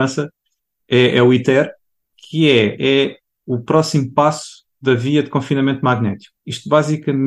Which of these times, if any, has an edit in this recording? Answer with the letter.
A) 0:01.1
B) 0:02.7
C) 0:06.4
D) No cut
B